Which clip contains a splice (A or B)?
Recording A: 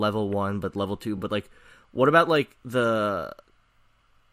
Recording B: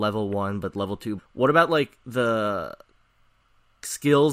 B